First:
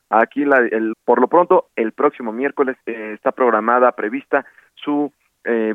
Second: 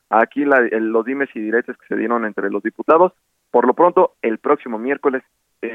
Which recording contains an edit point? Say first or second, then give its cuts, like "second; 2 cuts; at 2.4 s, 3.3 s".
first; 2 cuts; at 0.9 s, 2.8 s